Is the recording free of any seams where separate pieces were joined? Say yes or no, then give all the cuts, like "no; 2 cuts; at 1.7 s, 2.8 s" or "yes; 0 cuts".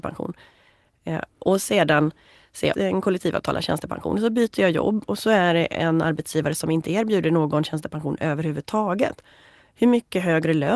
no; 1 cut; at 2.7 s